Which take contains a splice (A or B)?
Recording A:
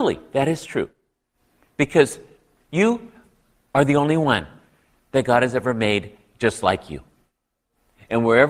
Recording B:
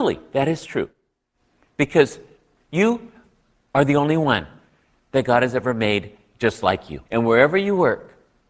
B